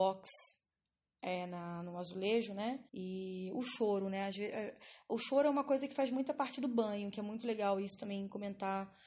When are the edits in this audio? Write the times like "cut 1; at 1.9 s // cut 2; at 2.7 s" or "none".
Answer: cut 1; at 2.9 s